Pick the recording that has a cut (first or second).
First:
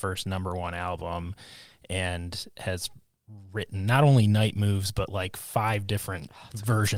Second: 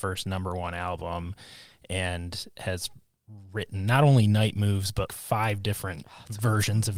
second